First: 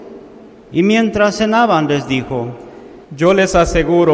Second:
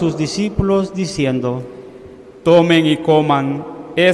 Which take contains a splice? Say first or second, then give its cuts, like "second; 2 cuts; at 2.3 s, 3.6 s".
first; 1 cut; at 3.0 s